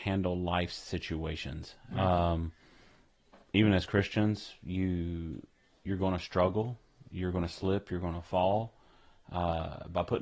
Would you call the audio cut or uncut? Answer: cut